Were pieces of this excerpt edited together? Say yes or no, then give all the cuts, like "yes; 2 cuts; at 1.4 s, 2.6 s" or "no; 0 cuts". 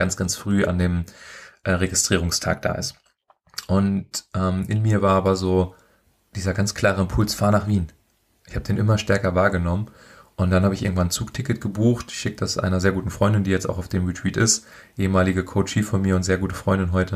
no; 0 cuts